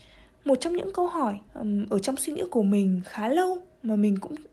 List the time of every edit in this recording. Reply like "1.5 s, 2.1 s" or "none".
1.5 s

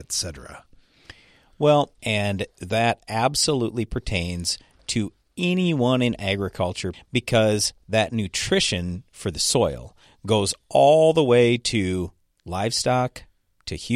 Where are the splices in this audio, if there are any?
2.0 s, 6.9 s

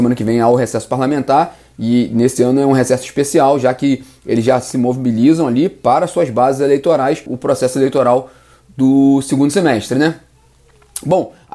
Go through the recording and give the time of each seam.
7.3 s

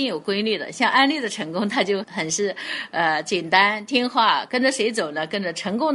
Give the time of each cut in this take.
2.0 s, 4.5 s

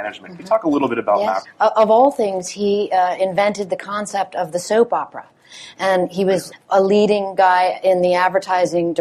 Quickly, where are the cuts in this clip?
1.4 s, 6.5 s

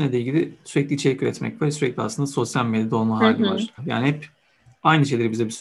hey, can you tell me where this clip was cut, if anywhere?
3.8 s

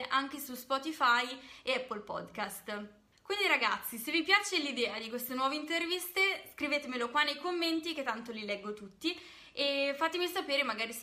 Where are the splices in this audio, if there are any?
none

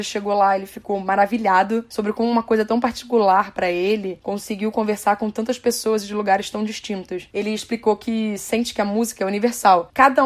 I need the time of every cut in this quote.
none

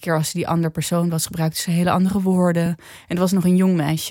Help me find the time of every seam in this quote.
none

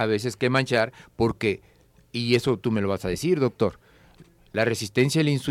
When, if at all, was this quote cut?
none

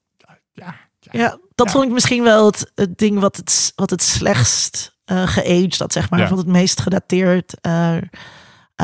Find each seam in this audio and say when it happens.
2.7 s

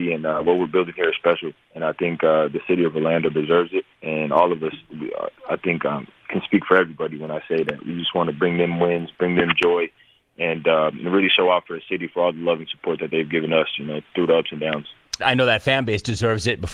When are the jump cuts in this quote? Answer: 3.9 s, 15.2 s

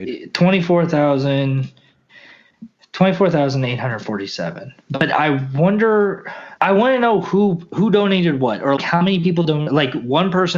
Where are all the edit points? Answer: 6.6 s, 8.8 s

